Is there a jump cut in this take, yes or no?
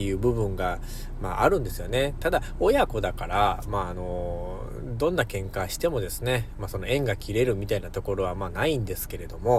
no